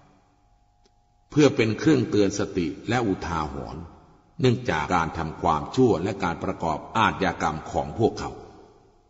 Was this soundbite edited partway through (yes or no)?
yes